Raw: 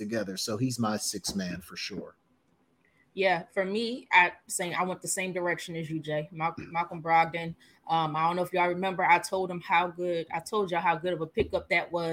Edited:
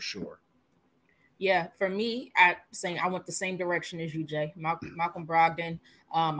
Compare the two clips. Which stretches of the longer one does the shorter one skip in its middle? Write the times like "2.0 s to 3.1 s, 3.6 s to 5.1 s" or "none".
none